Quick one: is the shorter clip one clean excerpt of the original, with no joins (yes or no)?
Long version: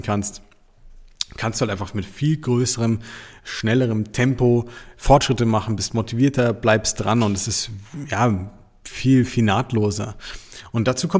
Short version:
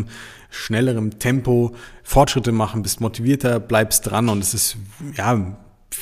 yes